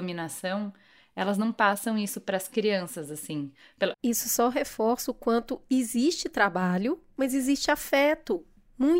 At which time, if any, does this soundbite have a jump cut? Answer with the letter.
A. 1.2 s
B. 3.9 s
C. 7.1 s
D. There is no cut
B